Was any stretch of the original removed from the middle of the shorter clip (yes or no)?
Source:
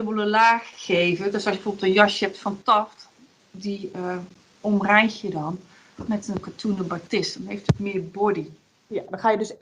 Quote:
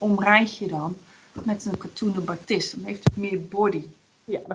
no